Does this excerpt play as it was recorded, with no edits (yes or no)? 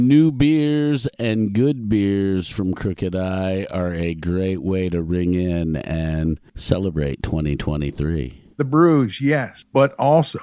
no